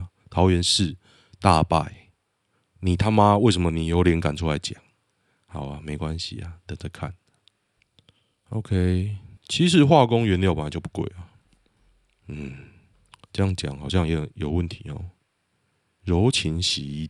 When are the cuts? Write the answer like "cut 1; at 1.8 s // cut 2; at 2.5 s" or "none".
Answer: cut 1; at 9.4 s